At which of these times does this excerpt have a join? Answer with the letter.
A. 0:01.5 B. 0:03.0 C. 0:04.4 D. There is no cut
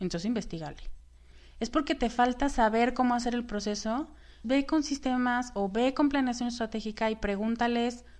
C